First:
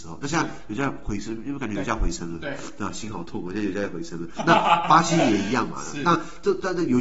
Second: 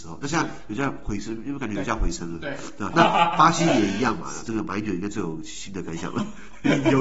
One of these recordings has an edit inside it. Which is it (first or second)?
second